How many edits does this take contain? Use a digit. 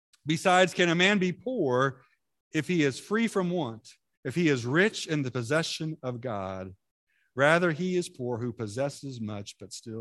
1